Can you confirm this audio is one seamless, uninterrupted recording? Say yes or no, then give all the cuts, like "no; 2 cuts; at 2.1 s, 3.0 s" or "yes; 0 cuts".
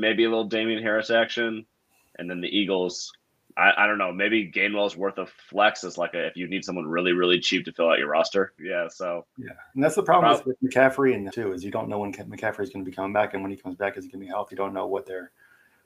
no; 3 cuts; at 8.6 s, 11.3 s, 14.5 s